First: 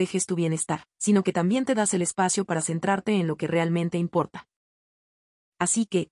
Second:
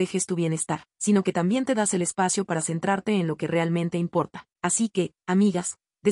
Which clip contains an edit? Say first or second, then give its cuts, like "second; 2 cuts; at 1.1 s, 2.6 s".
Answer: second; 1 cut; at 4.5 s